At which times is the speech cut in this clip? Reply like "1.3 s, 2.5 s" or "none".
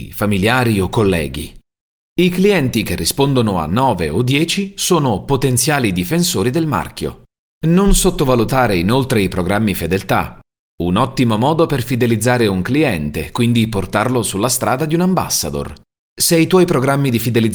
none